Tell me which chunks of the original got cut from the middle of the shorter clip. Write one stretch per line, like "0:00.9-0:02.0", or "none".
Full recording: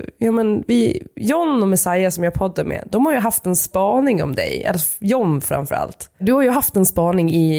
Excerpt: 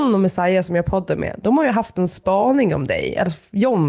none